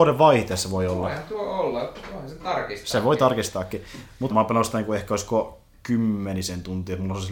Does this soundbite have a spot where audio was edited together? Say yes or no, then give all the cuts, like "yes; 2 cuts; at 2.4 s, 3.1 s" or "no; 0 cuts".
yes; 1 cut; at 4.3 s